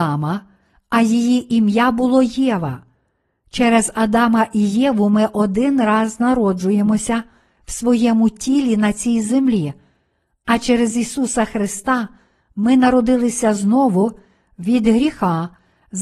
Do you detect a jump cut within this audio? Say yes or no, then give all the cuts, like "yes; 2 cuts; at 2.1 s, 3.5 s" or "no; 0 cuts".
no; 0 cuts